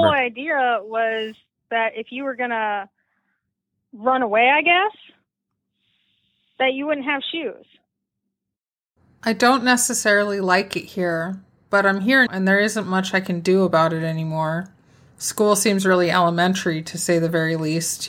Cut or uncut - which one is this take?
cut